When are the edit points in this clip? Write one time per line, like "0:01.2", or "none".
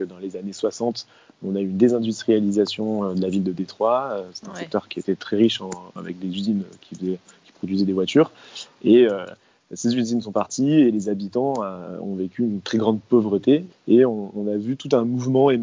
0:13.7